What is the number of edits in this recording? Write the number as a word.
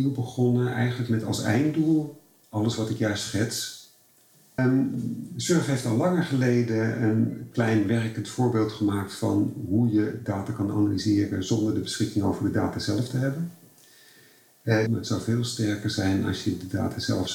two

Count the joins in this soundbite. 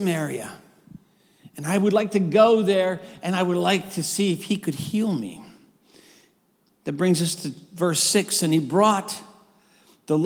zero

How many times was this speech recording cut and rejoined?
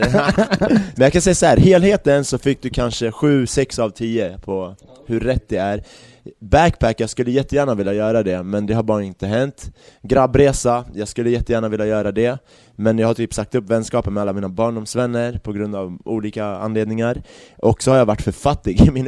one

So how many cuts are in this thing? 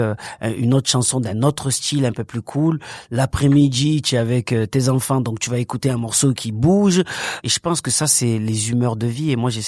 one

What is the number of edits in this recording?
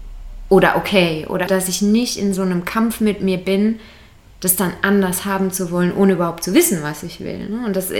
one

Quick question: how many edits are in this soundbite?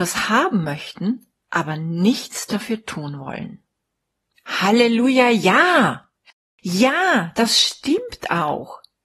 one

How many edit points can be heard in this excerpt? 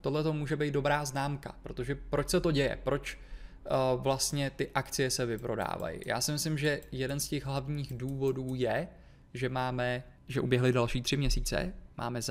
one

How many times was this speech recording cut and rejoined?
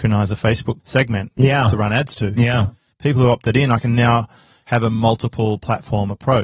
zero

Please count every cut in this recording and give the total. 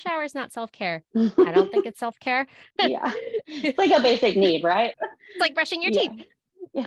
one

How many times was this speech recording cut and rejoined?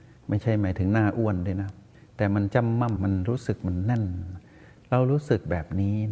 one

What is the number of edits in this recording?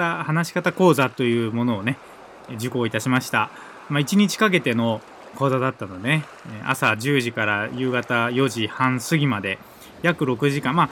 zero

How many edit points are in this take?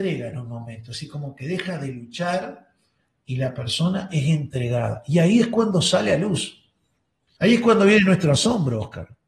one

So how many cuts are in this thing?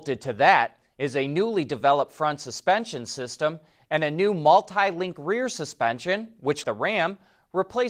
one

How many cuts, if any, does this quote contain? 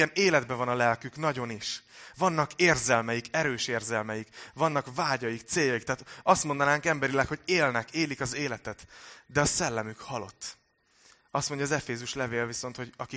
zero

